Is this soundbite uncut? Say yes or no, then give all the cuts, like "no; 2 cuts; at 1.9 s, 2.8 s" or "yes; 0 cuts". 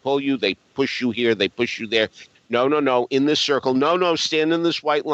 no; 1 cut; at 2.3 s